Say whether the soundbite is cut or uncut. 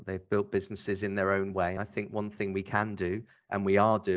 uncut